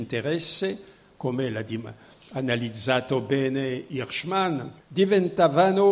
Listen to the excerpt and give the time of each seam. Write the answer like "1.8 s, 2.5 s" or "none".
4.8 s